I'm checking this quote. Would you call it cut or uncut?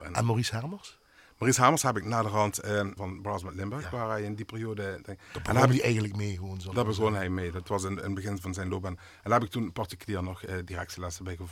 cut